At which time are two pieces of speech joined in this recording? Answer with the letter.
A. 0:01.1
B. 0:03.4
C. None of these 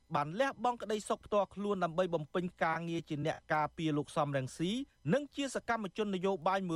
C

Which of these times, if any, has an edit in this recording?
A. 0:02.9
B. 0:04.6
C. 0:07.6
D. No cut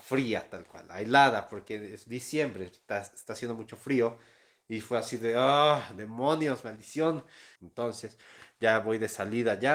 C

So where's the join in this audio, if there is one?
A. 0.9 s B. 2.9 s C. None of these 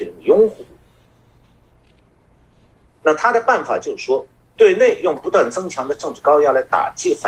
B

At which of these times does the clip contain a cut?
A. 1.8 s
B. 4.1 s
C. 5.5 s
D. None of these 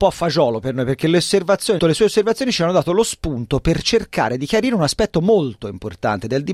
A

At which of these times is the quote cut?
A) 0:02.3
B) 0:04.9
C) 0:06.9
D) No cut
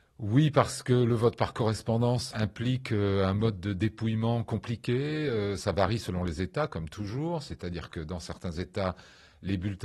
A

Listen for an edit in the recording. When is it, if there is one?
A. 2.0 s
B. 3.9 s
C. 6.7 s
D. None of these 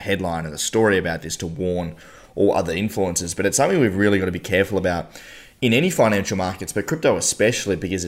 D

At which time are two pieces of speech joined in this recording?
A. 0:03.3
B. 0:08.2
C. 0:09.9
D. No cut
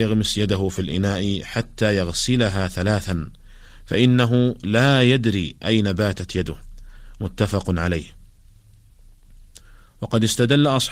D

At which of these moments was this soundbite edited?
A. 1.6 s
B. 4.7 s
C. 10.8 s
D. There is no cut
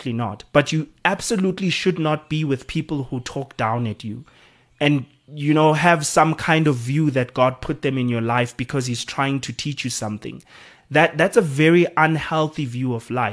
D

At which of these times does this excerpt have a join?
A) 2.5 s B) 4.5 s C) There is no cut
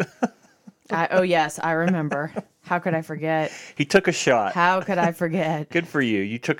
C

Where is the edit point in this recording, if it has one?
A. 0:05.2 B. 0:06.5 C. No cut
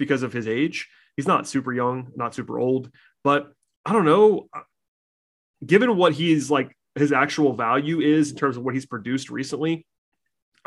C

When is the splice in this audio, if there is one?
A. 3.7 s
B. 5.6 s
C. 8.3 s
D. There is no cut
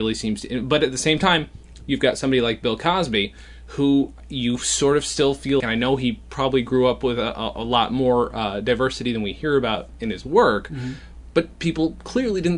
B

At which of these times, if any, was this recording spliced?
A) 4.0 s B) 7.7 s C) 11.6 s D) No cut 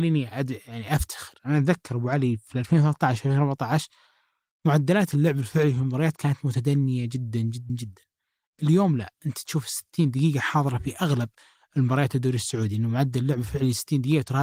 B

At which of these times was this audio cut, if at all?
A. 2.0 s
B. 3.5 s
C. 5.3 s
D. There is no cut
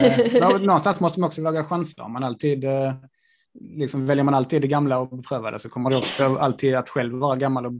D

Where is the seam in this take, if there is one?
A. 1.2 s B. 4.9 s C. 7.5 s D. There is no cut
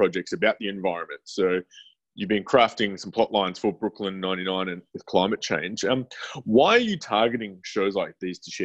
B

